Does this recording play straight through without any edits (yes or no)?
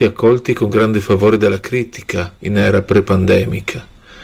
no